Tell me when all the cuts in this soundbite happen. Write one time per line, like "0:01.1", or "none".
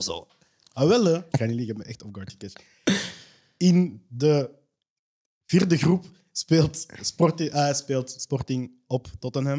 0:01.3